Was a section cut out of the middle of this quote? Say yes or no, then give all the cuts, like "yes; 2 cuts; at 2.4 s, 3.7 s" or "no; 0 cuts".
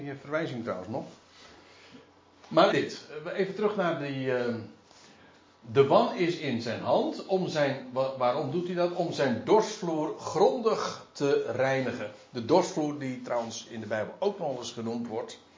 yes; 1 cut; at 2.7 s